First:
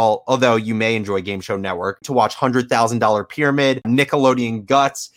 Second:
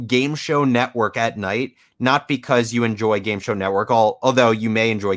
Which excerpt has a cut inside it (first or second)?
first